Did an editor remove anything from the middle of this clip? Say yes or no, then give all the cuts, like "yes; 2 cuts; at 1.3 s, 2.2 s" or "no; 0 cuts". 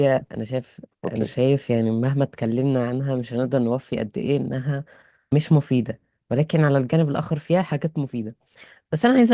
no; 0 cuts